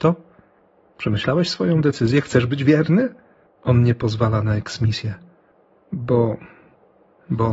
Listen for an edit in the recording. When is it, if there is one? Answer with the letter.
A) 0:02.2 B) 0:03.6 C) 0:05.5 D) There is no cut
B